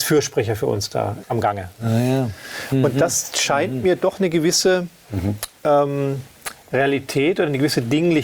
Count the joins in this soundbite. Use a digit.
1